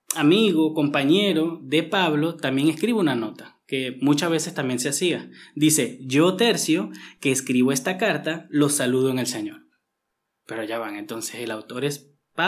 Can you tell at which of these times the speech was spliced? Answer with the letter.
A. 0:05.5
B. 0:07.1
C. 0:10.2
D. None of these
D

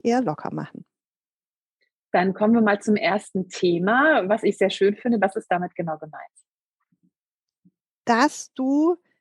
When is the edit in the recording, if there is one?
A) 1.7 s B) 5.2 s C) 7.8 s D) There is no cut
B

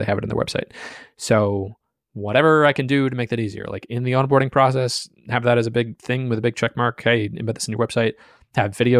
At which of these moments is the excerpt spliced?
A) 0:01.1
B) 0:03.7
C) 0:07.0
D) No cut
D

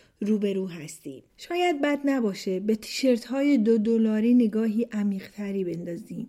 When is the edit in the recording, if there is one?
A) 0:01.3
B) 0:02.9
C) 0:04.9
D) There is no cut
A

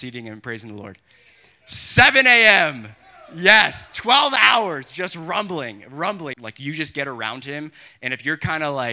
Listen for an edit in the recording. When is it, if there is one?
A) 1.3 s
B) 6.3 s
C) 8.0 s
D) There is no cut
B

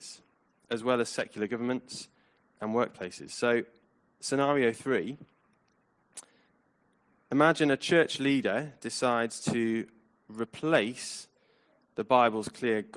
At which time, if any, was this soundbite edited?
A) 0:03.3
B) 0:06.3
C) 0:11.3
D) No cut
D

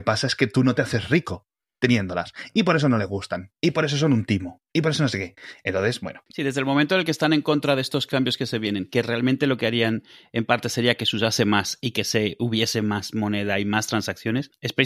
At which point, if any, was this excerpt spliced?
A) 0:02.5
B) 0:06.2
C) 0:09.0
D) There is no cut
D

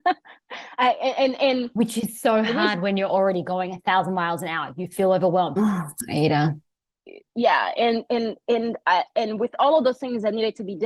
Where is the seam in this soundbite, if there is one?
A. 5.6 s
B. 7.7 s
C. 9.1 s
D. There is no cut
A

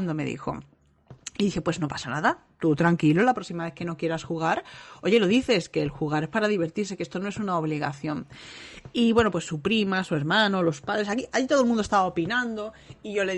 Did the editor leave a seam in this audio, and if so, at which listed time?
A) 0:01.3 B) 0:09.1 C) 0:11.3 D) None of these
D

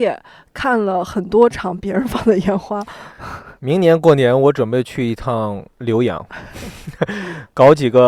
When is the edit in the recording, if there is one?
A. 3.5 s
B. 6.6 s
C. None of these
C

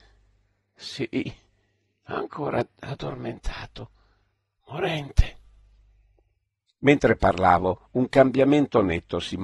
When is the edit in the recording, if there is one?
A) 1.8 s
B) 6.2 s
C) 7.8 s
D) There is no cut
D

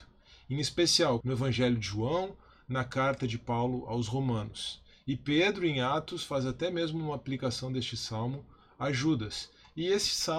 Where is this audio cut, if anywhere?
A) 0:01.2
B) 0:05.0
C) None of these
A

